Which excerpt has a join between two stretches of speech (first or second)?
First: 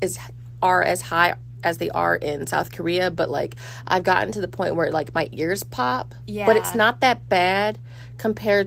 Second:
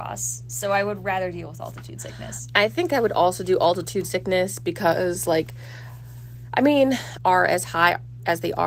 second